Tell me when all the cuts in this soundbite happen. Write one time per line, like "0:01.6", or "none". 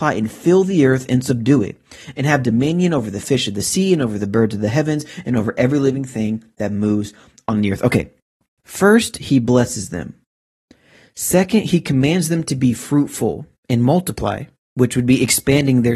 0:08.6